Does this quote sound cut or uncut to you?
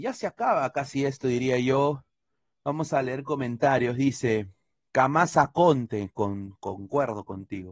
uncut